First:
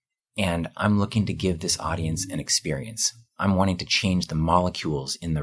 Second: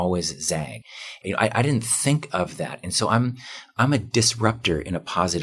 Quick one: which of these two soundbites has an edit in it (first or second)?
second